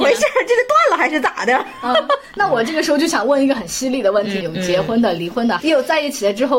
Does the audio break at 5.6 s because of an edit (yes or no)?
yes